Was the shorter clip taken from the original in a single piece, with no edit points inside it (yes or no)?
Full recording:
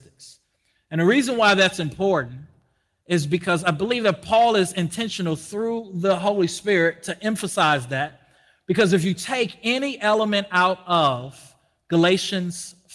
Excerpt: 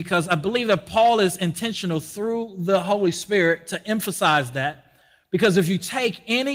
yes